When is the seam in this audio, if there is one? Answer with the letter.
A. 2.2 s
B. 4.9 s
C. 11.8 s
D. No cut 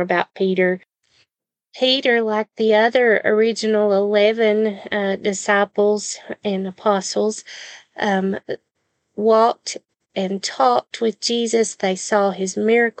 D